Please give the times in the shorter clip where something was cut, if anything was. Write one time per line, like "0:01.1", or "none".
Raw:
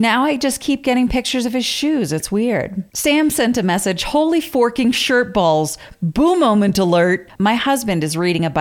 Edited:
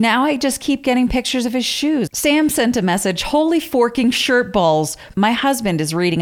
0:02.1
0:05.1